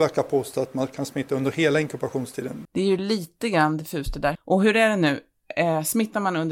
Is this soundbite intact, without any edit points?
no; 2 cuts; at 2.7 s, 4.4 s

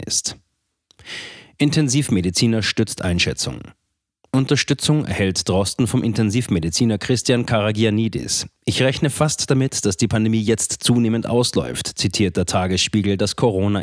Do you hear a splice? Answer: no; 0 cuts

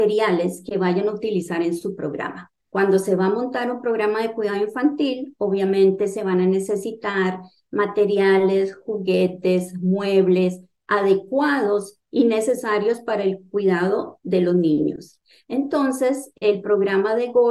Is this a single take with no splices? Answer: no; 1 cut; at 2.6 s

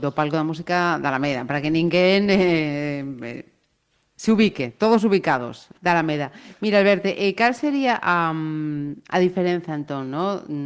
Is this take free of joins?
no; 1 cut; at 5.8 s

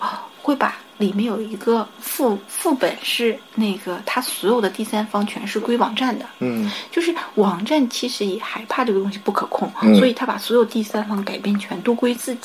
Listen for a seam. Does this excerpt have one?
no; 0 cuts

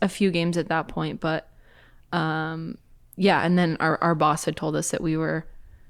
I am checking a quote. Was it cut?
no; 0 cuts

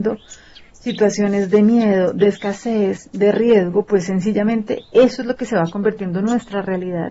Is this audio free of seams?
yes; 0 cuts

